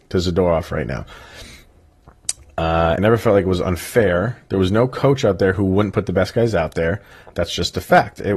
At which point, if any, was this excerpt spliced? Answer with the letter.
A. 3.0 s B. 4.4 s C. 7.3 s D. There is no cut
A